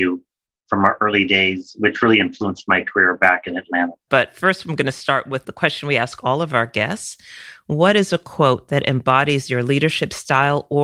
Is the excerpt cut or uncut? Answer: cut